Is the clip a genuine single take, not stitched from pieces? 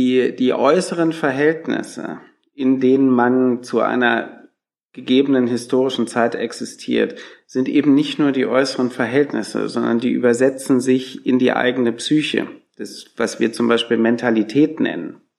yes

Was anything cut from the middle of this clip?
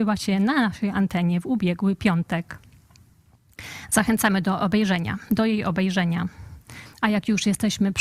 yes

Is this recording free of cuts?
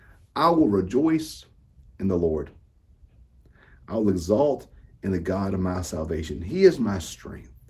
yes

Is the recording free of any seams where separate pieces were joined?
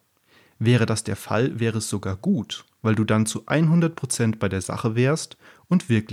yes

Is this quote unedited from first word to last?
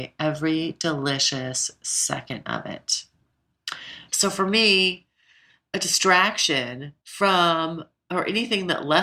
no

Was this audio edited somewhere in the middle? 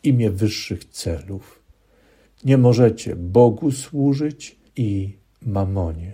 yes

